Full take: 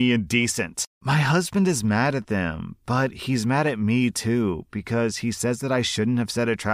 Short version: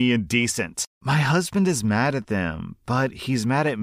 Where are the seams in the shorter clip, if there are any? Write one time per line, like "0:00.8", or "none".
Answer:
none